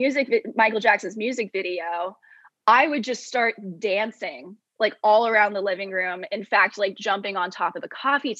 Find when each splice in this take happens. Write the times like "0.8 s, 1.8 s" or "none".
none